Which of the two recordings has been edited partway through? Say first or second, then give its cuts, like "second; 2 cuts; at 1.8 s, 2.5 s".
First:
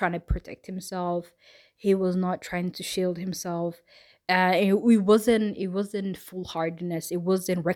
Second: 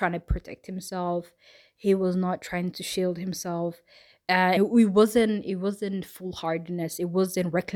second; 1 cut; at 4.6 s